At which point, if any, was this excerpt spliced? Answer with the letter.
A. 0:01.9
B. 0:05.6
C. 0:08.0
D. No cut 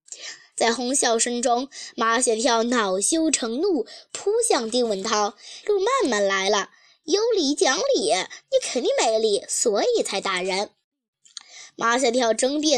B